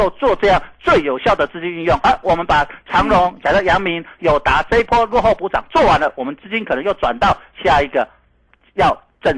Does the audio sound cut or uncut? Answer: uncut